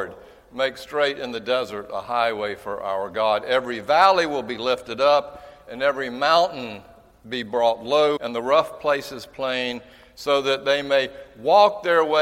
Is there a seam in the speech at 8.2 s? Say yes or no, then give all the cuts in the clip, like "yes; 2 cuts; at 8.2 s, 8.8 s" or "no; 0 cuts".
yes; 1 cut; at 8.2 s